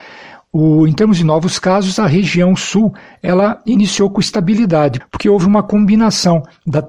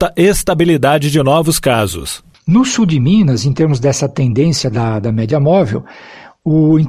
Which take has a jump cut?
first; 1 cut; at 5.0 s

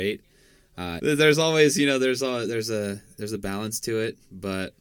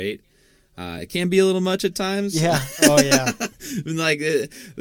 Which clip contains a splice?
first; 1 cut; at 1.0 s

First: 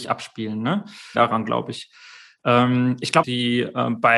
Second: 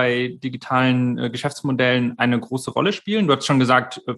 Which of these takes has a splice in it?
first; 2 cuts; at 1.1 s, 3.2 s

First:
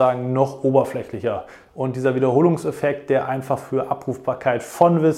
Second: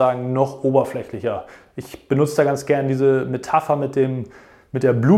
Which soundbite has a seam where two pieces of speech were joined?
first; 1 cut; at 1.7 s

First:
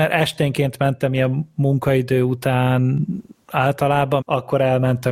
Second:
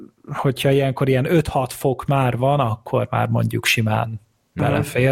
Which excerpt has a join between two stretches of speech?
first; 1 cut; at 4.2 s

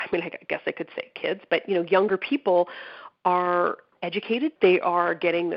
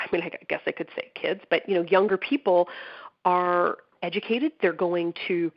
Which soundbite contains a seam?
first; 1 cut; at 4.6 s

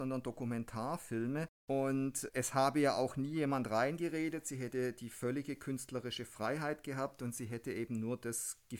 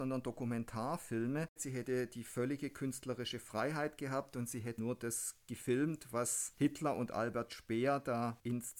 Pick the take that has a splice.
second; 2 cuts; at 1.6 s, 4.8 s

